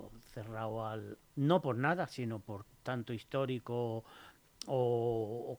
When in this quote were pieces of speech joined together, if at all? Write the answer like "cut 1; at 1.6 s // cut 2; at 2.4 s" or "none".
cut 1; at 1.2 s // cut 2; at 2.8 s